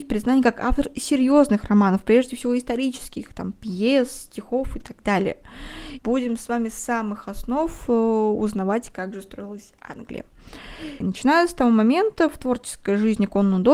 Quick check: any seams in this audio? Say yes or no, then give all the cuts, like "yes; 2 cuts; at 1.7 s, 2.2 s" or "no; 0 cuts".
yes; 2 cuts; at 6.0 s, 11.0 s